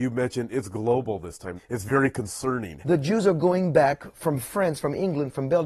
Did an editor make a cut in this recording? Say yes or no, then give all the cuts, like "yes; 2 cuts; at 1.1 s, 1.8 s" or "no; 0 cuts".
yes; 2 cuts; at 1.6 s, 2.8 s